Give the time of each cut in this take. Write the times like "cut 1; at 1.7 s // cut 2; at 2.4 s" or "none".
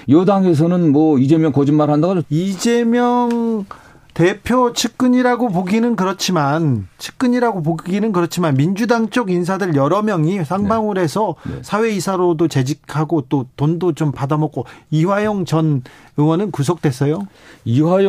cut 1; at 2.2 s

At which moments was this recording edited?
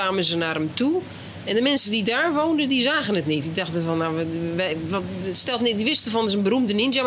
none

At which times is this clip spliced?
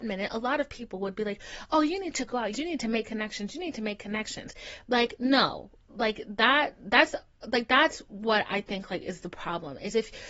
cut 1; at 2.5 s // cut 2; at 4.8 s

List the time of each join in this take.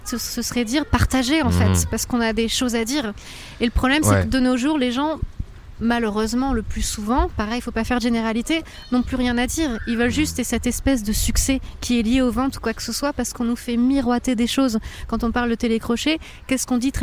none

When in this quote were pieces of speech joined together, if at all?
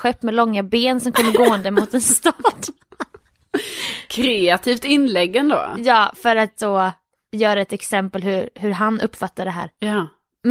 none

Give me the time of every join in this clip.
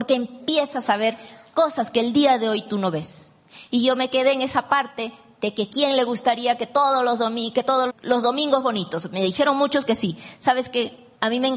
cut 1; at 7.9 s

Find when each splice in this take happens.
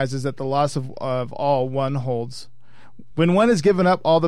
cut 1; at 3.1 s

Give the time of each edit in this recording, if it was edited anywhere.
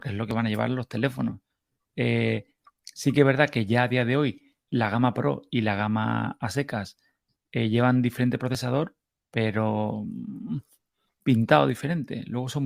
none

